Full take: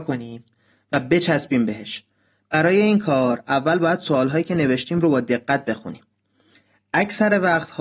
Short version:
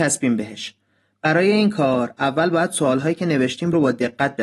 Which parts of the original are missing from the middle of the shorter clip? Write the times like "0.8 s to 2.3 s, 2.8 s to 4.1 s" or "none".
none